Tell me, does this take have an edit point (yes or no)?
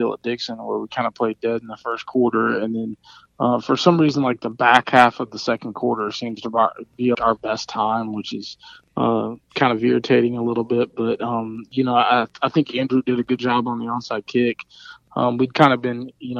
yes